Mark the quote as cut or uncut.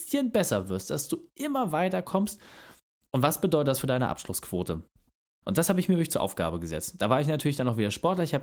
cut